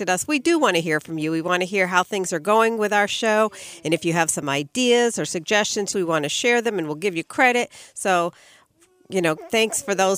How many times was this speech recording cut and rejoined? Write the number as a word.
one